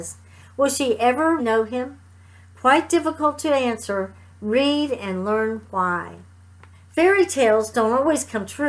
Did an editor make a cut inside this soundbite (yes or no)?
yes